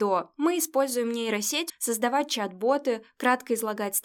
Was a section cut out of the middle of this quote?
yes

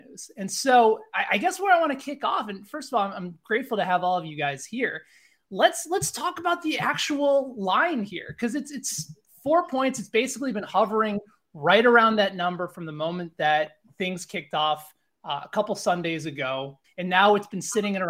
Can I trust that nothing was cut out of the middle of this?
no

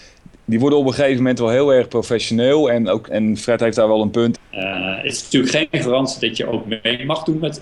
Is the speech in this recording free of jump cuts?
no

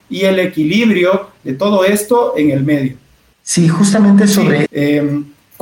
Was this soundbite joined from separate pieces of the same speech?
yes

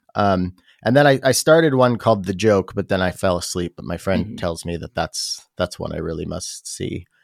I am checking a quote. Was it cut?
no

